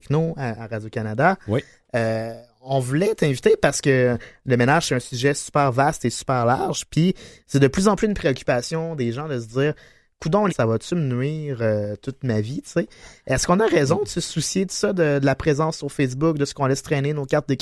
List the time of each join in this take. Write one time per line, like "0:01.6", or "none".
0:10.5